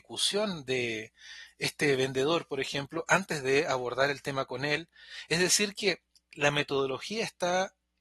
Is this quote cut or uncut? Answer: uncut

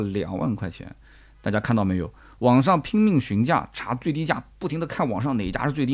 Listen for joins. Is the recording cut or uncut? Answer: uncut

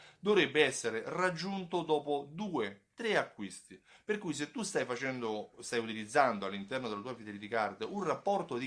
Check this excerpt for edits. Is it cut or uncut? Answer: cut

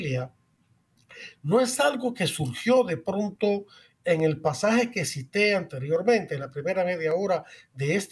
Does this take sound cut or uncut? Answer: uncut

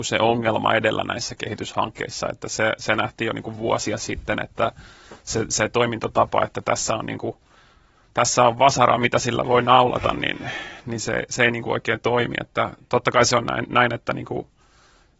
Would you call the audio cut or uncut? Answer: uncut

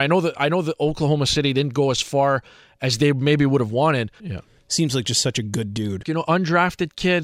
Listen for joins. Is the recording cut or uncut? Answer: cut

